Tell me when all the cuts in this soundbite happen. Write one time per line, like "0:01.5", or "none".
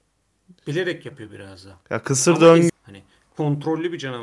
0:02.7